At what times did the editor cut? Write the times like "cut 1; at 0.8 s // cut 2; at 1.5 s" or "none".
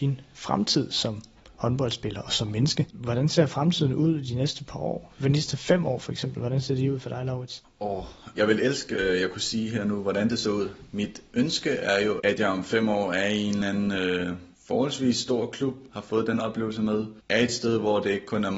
cut 1; at 8.3 s // cut 2; at 14.5 s // cut 3; at 15.9 s